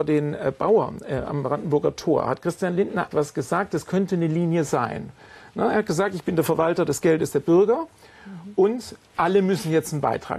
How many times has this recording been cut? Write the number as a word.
one